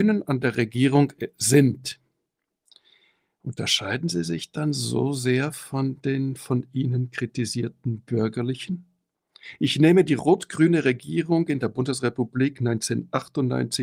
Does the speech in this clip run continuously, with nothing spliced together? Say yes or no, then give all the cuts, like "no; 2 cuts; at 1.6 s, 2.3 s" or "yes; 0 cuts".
yes; 0 cuts